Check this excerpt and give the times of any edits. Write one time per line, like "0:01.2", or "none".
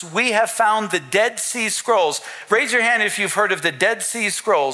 none